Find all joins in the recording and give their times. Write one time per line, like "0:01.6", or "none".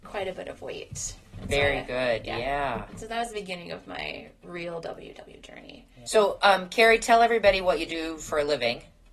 0:06.1